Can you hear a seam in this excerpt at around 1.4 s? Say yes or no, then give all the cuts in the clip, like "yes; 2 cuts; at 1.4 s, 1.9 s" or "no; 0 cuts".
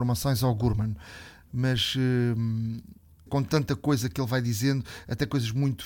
no; 1 cut; at 3.3 s